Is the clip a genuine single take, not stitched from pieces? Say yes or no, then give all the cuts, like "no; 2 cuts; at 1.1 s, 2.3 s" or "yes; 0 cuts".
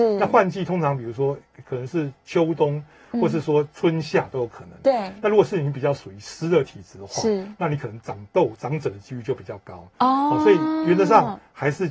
yes; 0 cuts